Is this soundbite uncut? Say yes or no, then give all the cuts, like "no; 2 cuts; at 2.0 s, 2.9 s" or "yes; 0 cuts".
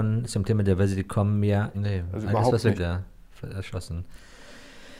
no; 2 cuts; at 1.7 s, 2.8 s